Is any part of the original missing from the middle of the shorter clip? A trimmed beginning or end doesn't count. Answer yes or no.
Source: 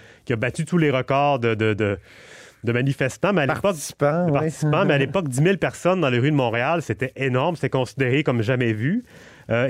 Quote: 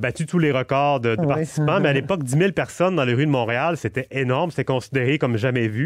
yes